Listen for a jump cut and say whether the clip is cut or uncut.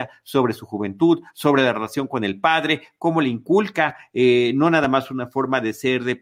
uncut